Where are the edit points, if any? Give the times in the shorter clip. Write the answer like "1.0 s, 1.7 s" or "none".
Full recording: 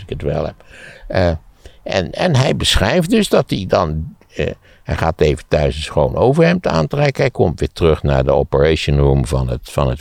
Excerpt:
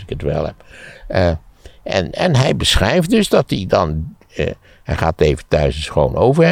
none